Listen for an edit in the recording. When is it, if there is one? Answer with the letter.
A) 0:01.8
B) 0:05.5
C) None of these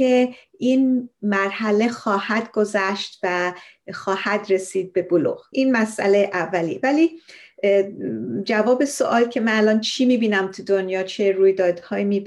B